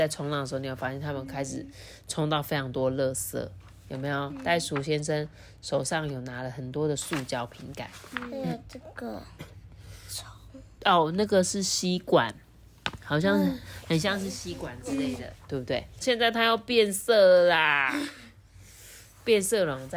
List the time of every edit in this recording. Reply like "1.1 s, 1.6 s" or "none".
16.0 s